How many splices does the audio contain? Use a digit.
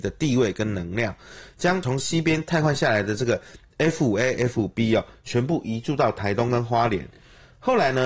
0